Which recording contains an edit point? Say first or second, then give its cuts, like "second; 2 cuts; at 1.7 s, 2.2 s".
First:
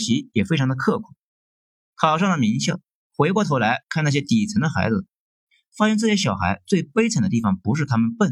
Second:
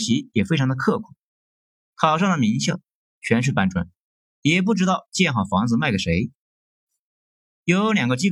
second; 1 cut; at 3.1 s